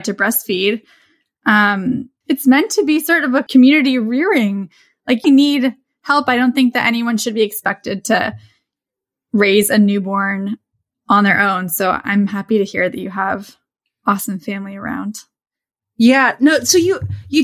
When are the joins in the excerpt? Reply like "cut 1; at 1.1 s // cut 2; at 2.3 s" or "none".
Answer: cut 1; at 2.2 s // cut 2; at 5.2 s